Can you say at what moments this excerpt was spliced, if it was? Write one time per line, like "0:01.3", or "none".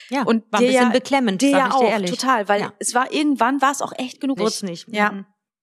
0:04.4

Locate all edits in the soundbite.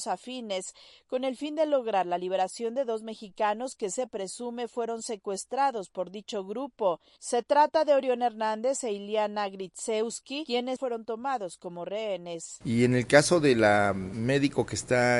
0:10.8
0:12.6

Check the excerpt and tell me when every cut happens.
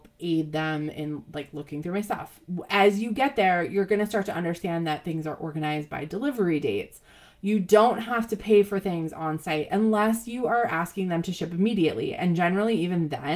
none

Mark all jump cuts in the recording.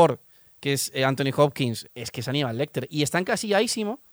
0:01.9

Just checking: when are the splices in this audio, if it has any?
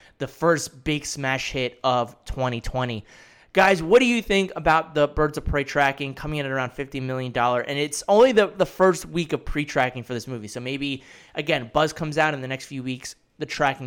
none

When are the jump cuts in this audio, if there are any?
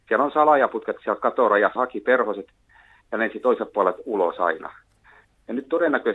0:01.8

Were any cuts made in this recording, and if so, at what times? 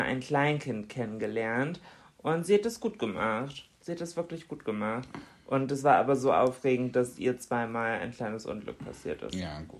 none

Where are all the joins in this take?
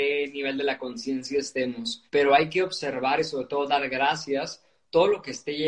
0:02.1

